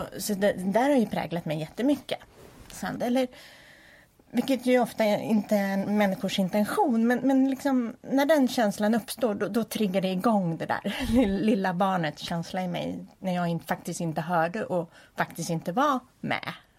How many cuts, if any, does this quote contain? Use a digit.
1